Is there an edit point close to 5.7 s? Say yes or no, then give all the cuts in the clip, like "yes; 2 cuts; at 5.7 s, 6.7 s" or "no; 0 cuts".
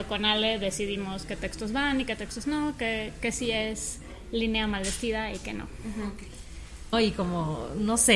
no; 1 cut; at 6.9 s